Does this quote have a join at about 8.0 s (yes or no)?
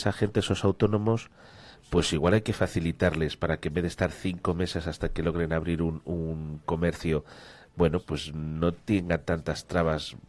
yes